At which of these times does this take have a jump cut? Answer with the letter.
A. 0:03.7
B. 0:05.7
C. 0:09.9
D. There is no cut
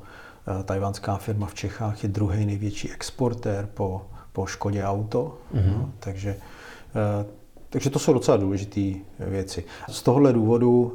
C